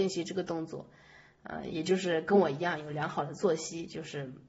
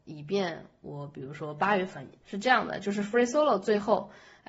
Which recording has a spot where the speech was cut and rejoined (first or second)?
second